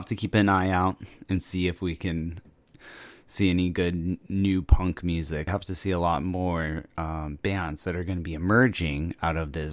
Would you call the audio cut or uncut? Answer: cut